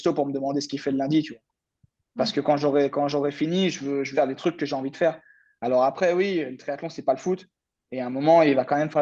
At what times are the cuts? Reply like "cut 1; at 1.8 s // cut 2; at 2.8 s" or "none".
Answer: cut 1; at 4.1 s